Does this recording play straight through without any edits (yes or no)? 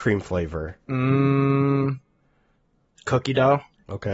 yes